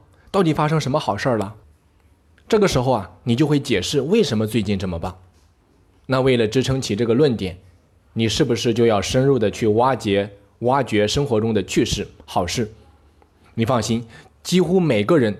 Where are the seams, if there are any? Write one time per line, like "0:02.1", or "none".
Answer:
0:01.6